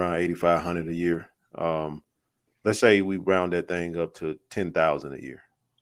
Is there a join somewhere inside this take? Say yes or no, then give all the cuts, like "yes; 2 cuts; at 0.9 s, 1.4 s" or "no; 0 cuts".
yes; 1 cut; at 2.8 s